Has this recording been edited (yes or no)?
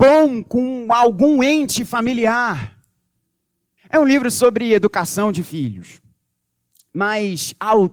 yes